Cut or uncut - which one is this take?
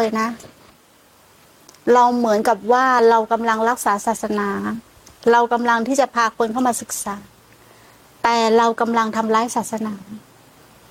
uncut